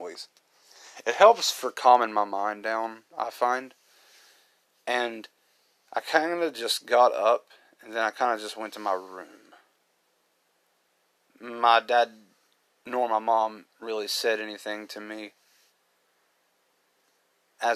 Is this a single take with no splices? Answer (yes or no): yes